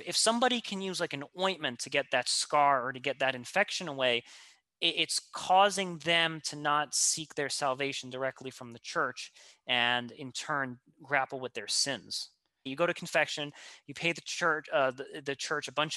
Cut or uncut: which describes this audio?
cut